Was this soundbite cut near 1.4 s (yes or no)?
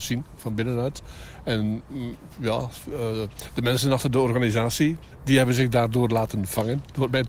no